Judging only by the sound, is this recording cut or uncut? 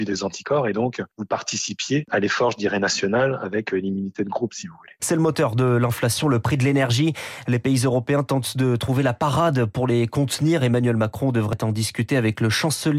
cut